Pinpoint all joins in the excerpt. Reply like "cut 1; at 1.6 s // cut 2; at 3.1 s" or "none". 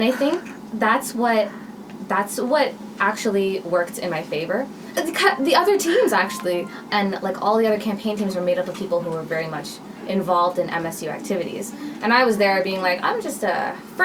cut 1; at 4.9 s // cut 2; at 6.9 s